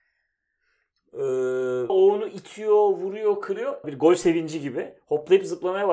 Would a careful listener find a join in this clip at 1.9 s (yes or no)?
yes